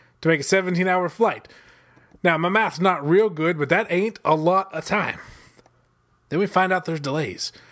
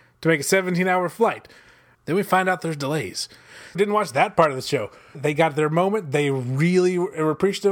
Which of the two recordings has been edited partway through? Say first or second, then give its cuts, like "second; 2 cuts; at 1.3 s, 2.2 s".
second; 3 cuts; at 1.9 s, 3.7 s, 5.1 s